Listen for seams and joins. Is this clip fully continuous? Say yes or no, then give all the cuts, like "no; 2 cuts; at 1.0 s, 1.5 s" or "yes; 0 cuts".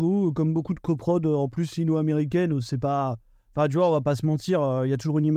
yes; 0 cuts